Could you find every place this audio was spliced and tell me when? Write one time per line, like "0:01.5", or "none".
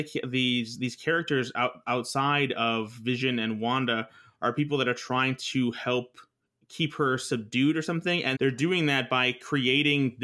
0:08.3